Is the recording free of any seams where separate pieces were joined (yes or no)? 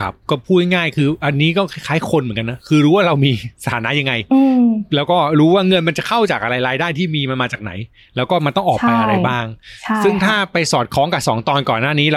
yes